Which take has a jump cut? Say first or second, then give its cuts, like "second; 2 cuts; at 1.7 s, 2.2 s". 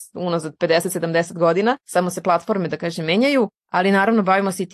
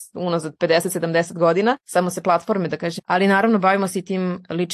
second; 1 cut; at 3.0 s